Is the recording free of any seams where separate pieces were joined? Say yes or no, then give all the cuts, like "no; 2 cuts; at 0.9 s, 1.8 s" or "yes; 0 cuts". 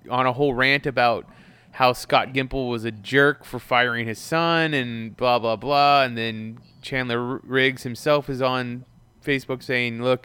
yes; 0 cuts